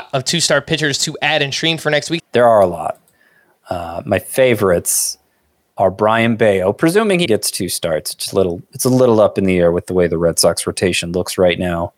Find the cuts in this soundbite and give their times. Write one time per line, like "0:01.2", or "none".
0:02.2
0:07.3